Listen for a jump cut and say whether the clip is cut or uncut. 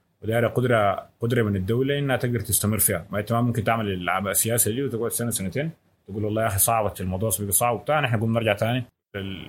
uncut